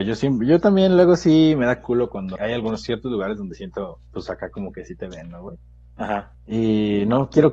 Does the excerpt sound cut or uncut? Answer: cut